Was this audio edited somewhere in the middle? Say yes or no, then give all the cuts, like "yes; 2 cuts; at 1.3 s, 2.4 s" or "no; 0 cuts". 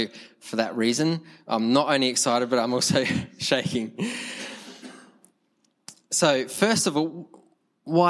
no; 0 cuts